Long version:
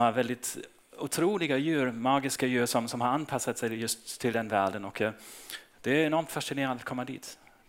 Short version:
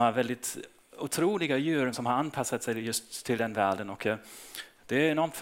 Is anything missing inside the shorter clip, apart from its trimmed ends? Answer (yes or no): yes